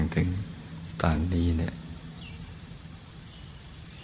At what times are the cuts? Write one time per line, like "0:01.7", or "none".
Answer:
none